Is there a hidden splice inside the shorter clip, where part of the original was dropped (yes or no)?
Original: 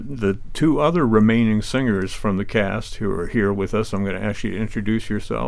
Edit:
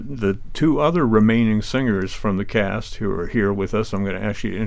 no